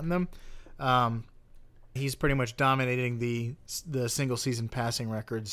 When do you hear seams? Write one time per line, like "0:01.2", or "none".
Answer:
0:02.0